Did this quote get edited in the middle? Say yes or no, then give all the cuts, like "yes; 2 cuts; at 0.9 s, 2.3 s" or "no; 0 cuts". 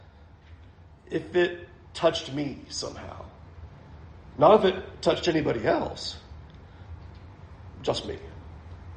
no; 0 cuts